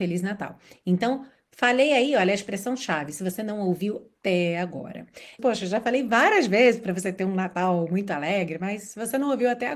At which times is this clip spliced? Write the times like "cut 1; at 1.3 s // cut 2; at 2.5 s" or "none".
cut 1; at 4.2 s // cut 2; at 5.4 s